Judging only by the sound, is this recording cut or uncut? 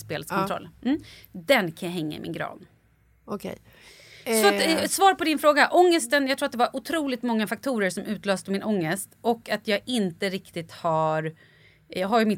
uncut